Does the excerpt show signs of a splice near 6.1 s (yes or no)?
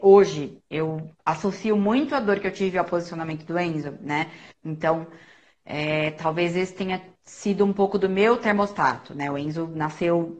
no